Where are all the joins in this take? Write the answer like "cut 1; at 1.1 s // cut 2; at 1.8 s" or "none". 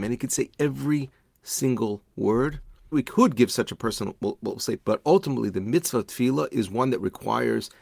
cut 1; at 2.9 s // cut 2; at 4.8 s